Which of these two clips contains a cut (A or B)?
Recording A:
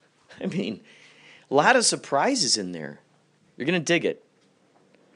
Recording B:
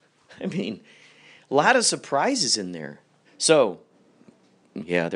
B